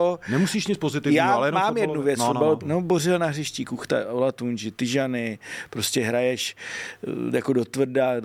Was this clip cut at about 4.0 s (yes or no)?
no